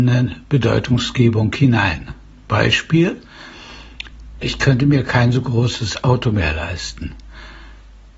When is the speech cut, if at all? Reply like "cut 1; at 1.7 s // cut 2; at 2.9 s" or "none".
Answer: cut 1; at 4.4 s